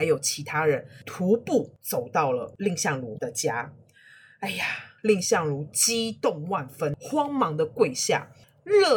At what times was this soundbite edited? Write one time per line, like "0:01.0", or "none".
0:05.0

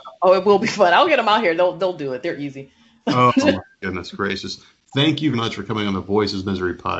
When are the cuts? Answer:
0:05.3

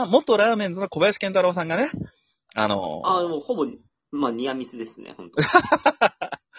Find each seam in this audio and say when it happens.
none

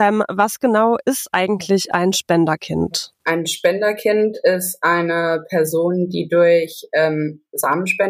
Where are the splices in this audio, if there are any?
0:03.2

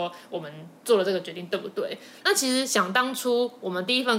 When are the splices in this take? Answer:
none

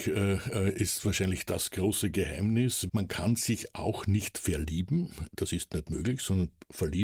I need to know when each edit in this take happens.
0:02.9

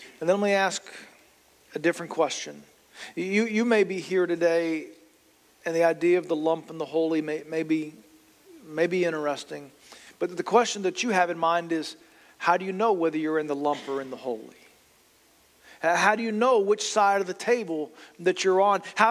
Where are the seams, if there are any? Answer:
none

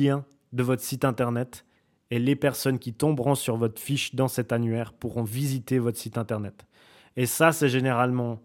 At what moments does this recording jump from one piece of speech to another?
none

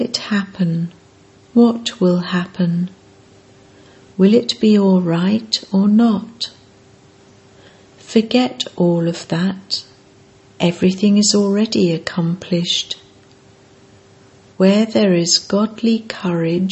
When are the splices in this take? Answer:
none

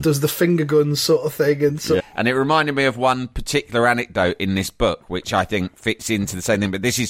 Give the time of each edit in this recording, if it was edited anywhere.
0:02.0

